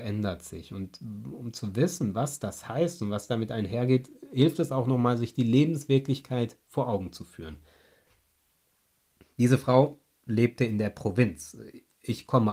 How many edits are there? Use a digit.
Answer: 0